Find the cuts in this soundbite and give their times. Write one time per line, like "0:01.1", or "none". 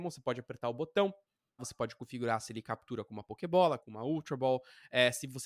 0:01.6
0:03.8